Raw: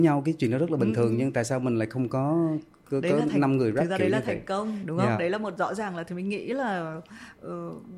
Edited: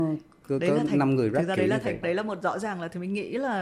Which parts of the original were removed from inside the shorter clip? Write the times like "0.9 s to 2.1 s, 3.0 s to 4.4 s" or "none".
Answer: 4.4 s to 5.2 s